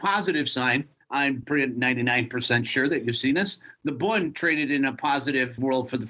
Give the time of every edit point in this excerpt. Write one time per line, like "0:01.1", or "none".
none